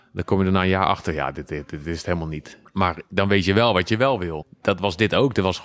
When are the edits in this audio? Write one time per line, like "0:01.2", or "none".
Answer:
0:02.6
0:04.4